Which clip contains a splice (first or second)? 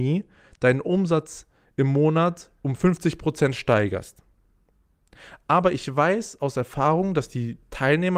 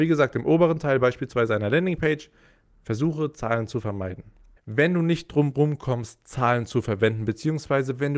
second